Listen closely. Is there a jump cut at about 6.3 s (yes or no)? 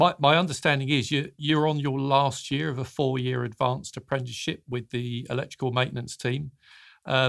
no